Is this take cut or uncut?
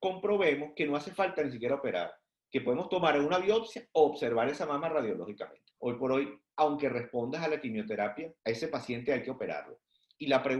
cut